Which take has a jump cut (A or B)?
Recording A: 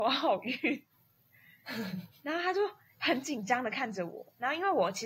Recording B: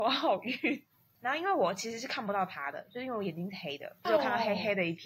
B